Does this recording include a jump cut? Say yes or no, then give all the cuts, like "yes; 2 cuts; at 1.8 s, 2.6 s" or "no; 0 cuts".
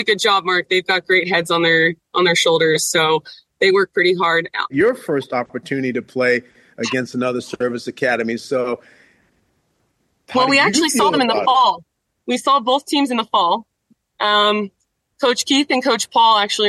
yes; 1 cut; at 4.7 s